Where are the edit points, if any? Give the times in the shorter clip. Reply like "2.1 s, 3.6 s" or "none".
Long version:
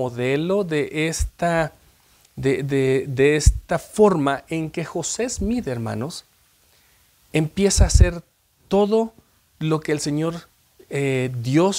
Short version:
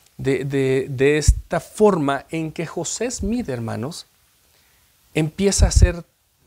none